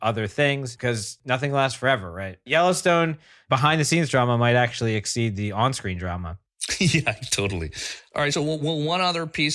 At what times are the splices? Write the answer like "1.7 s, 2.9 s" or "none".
none